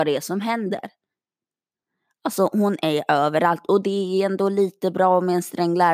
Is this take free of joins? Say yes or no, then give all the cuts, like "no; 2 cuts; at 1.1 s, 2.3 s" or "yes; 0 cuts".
yes; 0 cuts